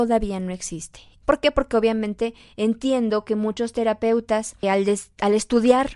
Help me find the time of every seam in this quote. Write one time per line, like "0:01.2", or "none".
0:01.2
0:04.6